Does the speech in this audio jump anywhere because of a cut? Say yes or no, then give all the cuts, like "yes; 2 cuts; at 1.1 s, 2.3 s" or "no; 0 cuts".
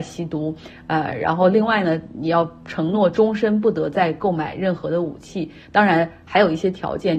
yes; 1 cut; at 5.6 s